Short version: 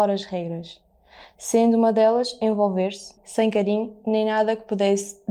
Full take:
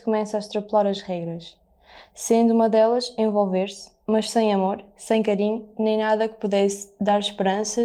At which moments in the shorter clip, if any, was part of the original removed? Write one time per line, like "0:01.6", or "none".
0:03.2